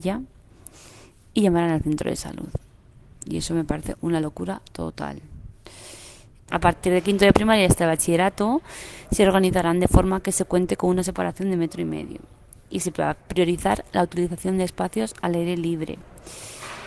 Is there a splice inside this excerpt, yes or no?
yes